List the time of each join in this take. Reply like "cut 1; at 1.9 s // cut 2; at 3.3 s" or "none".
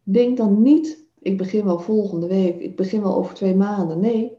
cut 1; at 1.2 s